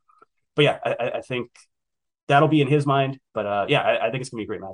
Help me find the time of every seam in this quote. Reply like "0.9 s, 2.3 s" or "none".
3.2 s